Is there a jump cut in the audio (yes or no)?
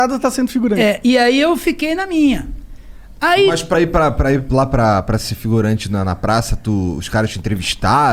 no